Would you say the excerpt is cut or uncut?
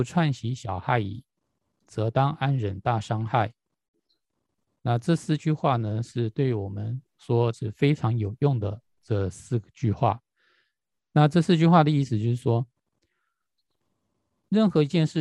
cut